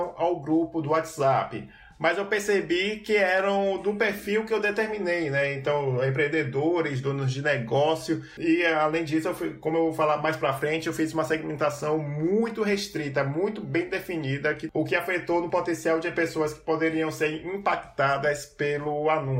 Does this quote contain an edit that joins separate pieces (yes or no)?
no